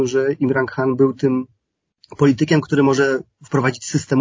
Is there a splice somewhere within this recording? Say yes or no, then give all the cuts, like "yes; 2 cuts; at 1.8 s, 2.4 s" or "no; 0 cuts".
no; 0 cuts